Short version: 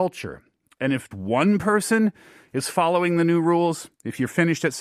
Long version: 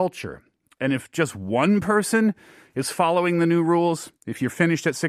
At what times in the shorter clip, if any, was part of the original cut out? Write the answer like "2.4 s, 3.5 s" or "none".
1.1 s